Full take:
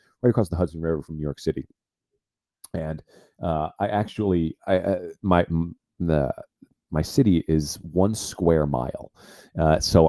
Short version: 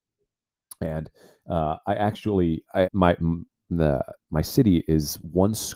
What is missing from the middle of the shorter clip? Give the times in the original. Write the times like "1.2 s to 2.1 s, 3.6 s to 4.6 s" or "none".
4.8 s to 5.2 s, 6.5 s to 6.8 s